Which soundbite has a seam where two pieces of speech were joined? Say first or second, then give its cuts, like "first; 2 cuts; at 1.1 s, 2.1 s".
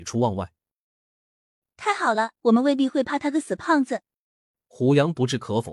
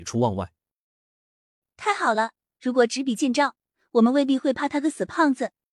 first; 1 cut; at 2.4 s